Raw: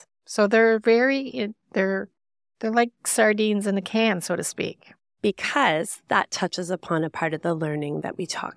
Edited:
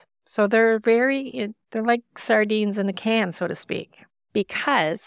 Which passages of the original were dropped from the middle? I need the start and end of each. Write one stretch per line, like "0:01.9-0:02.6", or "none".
0:01.6-0:02.5